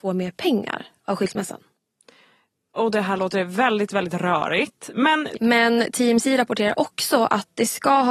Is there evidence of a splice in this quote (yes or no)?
yes